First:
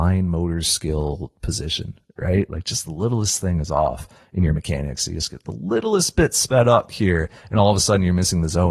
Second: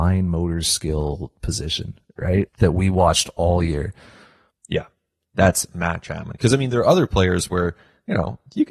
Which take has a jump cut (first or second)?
second